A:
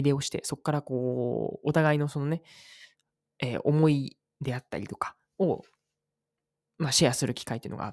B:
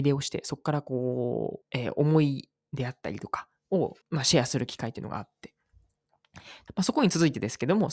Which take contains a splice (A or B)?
B